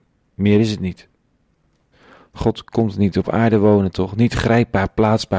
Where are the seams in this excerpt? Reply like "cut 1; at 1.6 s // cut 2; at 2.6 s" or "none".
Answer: none